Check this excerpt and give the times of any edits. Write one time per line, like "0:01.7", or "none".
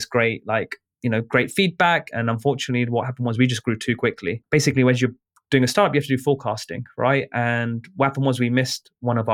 0:02.1